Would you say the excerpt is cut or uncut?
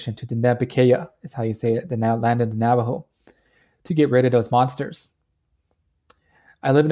uncut